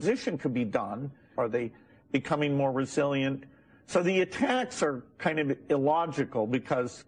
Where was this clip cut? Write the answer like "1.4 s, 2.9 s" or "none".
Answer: 1.3 s

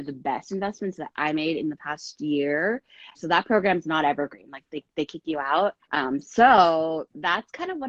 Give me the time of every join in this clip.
3.1 s, 5.8 s

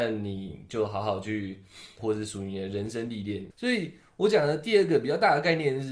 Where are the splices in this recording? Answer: 2.0 s, 3.5 s

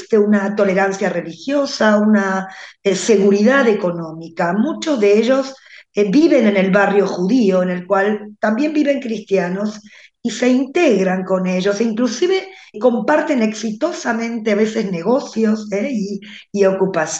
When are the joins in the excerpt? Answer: 12.7 s

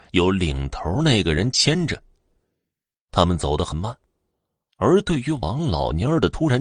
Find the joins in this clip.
none

